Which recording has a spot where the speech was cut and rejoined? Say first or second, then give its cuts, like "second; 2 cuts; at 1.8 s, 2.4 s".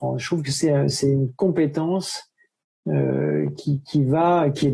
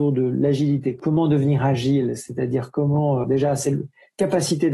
second; 1 cut; at 3.2 s